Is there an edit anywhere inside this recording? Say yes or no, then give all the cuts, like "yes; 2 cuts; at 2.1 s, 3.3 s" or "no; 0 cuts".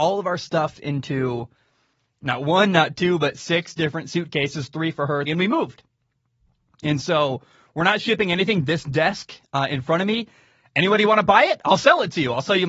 yes; 1 cut; at 5.3 s